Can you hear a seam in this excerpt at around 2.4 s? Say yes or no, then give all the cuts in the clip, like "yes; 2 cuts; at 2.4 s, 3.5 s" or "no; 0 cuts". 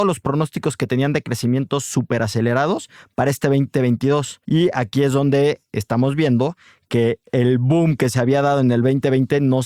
no; 2 cuts; at 4.4 s, 7.2 s